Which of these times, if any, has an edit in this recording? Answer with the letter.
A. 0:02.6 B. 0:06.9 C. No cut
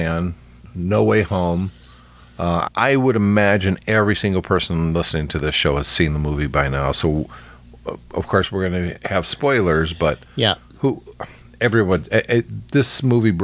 A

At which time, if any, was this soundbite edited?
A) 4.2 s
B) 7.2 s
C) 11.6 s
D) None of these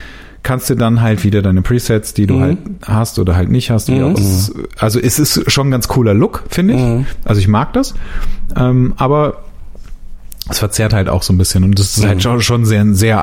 A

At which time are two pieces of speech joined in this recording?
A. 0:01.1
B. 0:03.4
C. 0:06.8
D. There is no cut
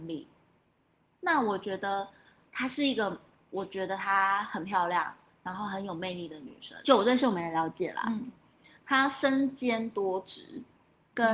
C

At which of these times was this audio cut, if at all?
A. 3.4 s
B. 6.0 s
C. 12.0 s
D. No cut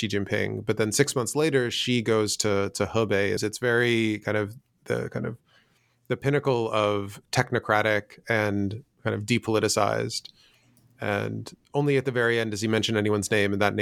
A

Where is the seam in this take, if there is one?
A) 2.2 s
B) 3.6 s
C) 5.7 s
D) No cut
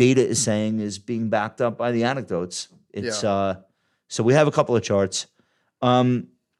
D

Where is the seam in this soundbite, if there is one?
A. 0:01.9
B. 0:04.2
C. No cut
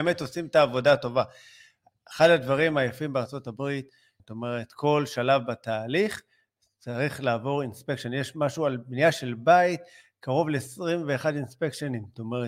B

